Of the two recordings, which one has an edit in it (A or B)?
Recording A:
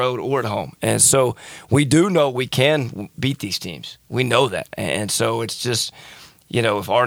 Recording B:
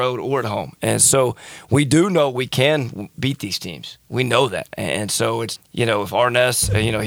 B